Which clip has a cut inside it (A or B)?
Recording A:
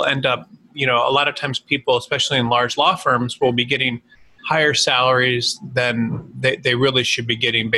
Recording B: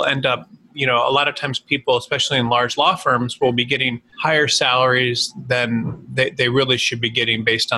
B